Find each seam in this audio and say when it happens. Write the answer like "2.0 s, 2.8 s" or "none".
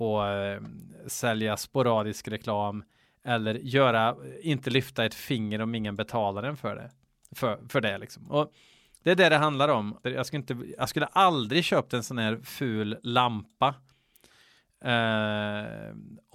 10.0 s